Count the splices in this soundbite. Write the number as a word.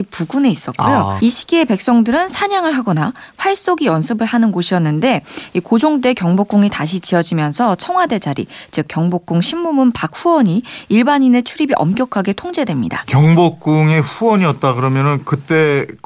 two